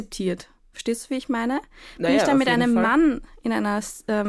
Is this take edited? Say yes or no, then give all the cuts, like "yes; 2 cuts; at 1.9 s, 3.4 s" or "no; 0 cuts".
no; 0 cuts